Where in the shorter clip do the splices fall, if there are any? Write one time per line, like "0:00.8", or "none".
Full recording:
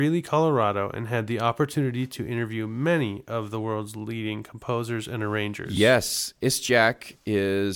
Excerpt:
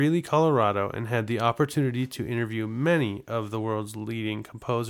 none